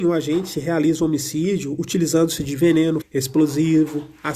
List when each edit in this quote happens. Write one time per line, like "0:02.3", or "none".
0:03.0